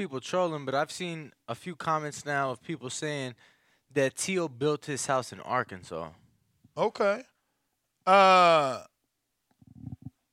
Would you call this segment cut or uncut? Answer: uncut